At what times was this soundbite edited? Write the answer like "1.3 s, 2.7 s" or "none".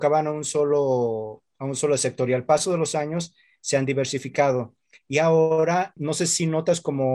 6.0 s